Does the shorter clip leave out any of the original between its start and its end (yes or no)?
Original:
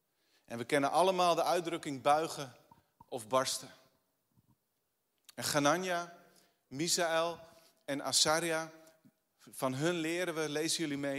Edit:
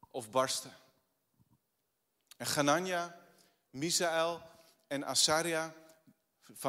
no